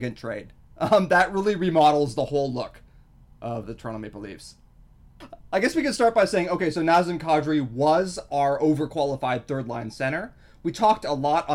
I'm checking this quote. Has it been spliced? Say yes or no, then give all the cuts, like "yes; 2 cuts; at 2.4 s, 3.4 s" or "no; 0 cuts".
yes; 1 cut; at 3.6 s